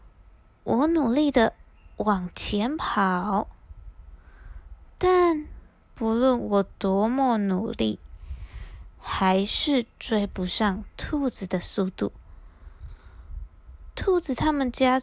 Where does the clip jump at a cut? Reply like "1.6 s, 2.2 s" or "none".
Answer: none